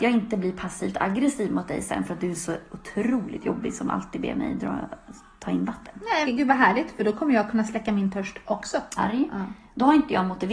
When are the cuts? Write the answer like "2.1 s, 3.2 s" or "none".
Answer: 6.2 s, 9.0 s

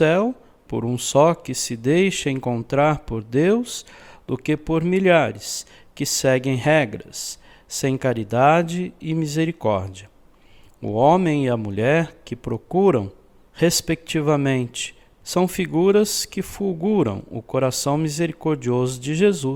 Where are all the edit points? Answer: 13.5 s, 15.2 s

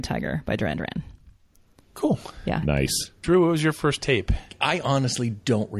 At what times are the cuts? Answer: none

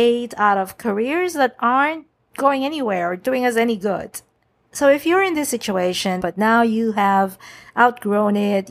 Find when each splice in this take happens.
4.6 s, 6.2 s

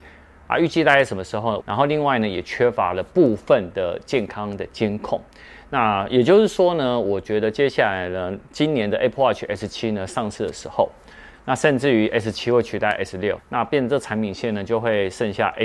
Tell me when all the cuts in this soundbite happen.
1.6 s, 11.3 s, 13.4 s

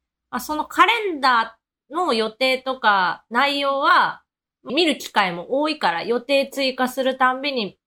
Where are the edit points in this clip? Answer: 4.7 s

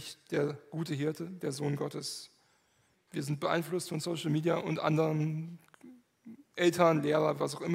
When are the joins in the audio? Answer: 2.9 s

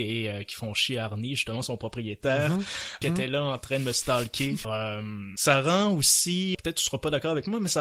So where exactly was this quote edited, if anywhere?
3.0 s, 4.6 s, 6.5 s

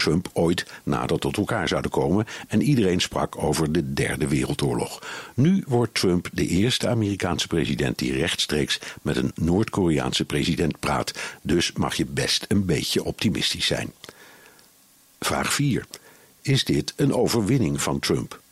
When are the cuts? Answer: none

